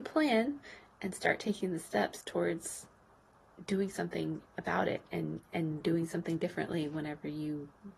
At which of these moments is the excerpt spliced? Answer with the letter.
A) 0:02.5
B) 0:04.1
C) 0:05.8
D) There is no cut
C